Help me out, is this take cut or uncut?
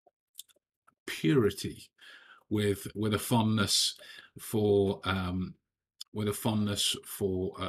uncut